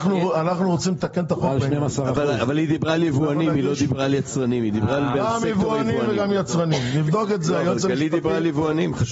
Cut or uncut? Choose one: uncut